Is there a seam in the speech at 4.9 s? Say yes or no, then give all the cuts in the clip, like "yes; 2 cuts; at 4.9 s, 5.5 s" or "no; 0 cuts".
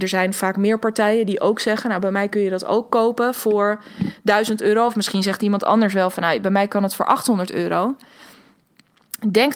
no; 0 cuts